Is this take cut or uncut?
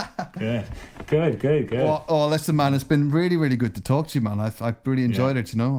uncut